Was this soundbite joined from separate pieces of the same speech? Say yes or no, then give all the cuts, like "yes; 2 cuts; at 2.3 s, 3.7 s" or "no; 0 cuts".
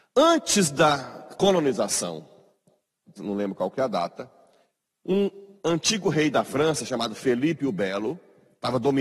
yes; 1 cut; at 3.2 s